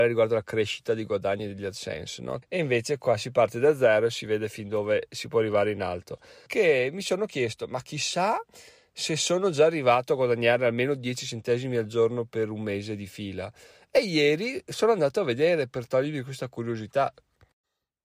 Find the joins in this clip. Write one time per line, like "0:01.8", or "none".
0:02.4
0:06.5